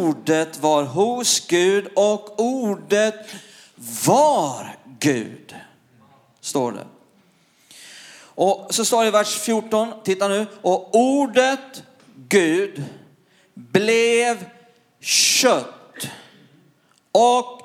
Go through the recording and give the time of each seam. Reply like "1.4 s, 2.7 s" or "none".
none